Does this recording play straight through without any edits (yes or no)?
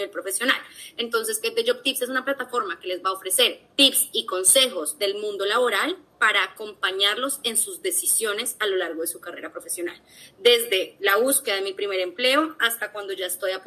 no